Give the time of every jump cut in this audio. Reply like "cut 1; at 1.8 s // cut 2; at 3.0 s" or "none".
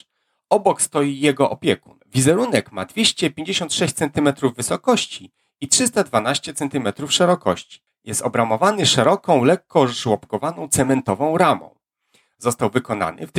cut 1; at 7.9 s